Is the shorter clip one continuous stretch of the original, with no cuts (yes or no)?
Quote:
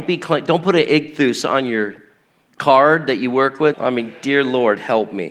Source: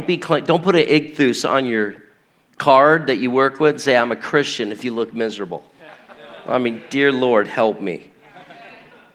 no